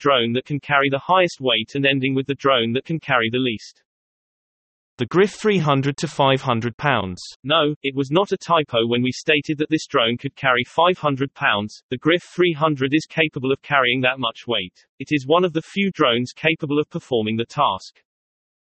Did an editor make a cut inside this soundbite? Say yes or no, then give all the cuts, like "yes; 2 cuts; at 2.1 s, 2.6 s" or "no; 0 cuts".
yes; 2 cuts; at 7.4 s, 14.9 s